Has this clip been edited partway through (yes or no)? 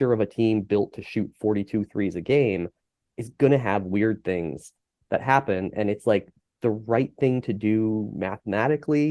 no